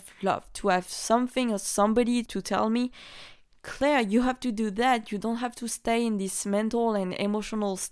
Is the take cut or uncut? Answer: uncut